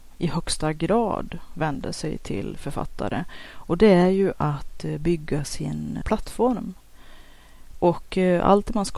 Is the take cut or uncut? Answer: cut